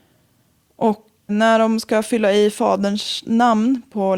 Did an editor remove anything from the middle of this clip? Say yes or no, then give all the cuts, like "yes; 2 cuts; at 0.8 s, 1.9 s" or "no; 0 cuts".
yes; 1 cut; at 1.3 s